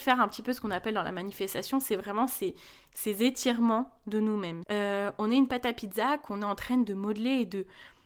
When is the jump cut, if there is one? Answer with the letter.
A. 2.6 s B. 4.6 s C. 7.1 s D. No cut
B